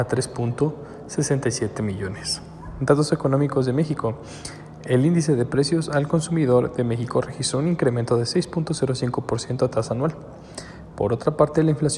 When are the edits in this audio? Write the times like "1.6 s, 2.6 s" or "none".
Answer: none